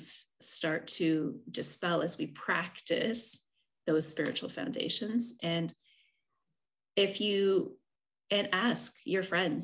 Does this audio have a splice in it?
yes; 1 cut; at 5.4 s

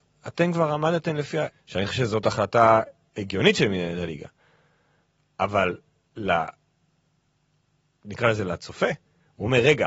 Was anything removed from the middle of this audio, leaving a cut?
yes; 1 cut; at 1.5 s

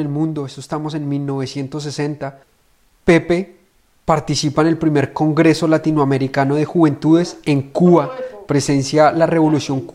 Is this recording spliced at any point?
no; 0 cuts

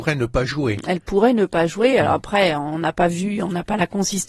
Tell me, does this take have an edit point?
no; 0 cuts

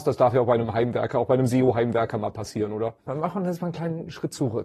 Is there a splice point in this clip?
yes; 1 cut; at 3.0 s

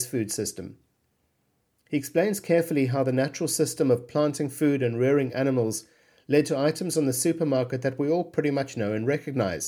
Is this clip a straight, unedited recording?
yes; 0 cuts

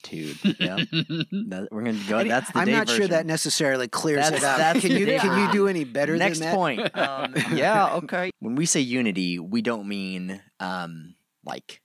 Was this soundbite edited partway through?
yes; 1 cut; at 8.3 s

